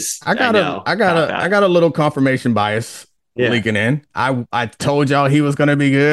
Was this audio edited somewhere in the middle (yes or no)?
no